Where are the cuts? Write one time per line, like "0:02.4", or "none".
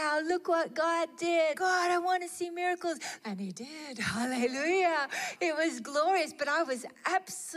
0:01.5
0:03.2